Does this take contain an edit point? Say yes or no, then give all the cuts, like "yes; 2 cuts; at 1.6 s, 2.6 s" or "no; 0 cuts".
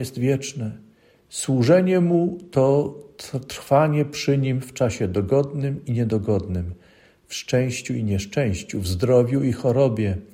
no; 0 cuts